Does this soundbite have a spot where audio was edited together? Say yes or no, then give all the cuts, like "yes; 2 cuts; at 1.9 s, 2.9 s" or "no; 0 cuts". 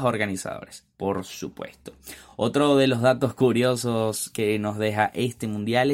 no; 0 cuts